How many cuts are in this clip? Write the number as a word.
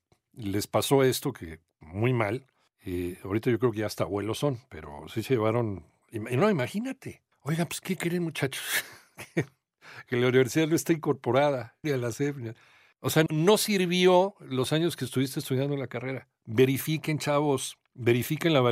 three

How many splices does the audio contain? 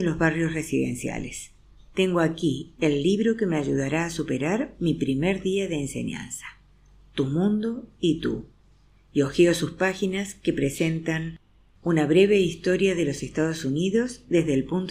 one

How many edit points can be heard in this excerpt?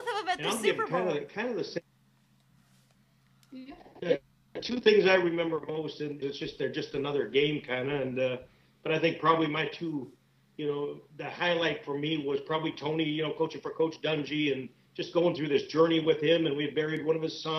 one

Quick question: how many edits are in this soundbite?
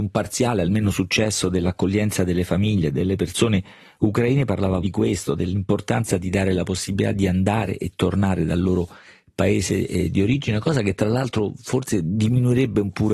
one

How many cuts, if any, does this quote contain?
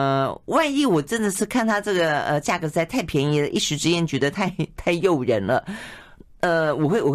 zero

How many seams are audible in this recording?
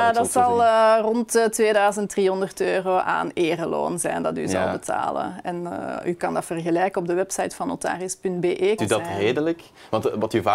one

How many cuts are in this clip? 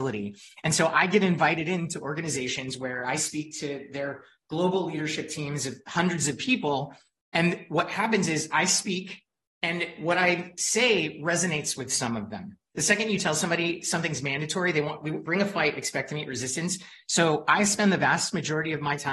three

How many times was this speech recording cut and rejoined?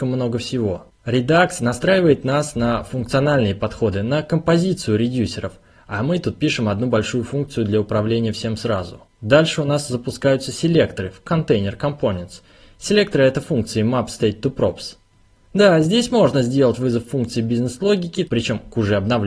two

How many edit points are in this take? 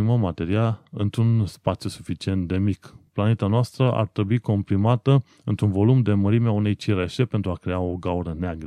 zero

